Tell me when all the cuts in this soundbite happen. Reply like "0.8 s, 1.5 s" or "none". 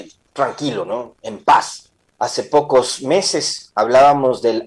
2.0 s